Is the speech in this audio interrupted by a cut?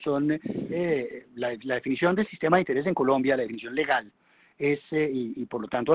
no; 0 cuts

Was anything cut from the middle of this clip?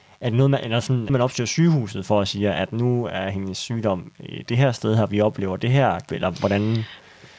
yes; 2 cuts; at 1.1 s, 6.1 s

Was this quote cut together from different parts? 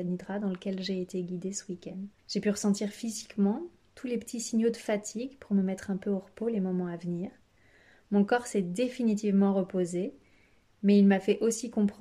yes; 1 cut; at 2.2 s

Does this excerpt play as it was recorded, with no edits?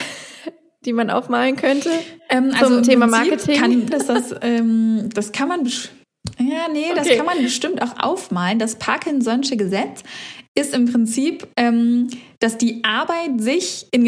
no; 1 cut; at 3.9 s

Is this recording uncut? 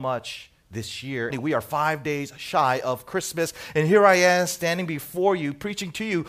no; 1 cut; at 1.3 s

